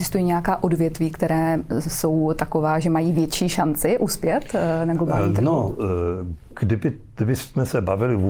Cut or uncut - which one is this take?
uncut